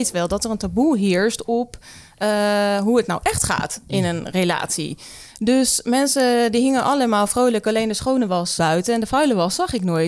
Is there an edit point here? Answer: yes; 1 cut; at 8.6 s

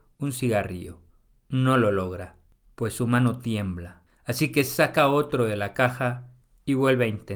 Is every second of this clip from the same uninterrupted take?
yes; 0 cuts

